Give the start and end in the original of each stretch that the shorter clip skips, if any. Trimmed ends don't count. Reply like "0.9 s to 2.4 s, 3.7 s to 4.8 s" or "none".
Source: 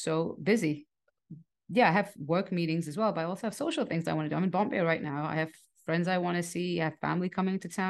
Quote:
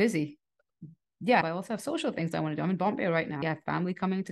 1.9 s to 3.1 s, 5.2 s to 6.8 s

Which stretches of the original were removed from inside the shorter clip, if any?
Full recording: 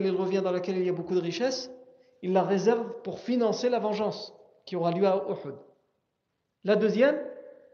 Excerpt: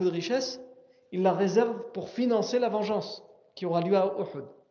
none

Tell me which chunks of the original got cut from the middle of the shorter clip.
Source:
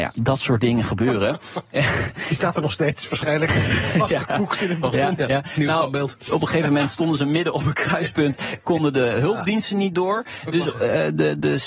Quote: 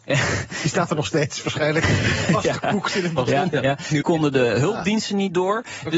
5.7 s to 8.6 s

